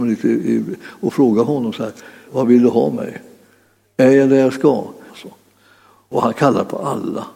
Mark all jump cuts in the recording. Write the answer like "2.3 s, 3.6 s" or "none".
2.3 s, 5.1 s